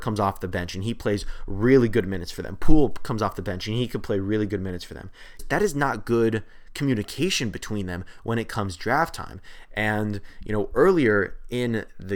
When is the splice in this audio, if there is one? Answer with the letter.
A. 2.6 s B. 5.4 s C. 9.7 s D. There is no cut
B